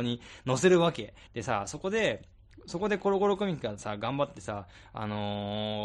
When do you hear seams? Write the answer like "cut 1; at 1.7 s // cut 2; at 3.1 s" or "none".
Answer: cut 1; at 1.3 s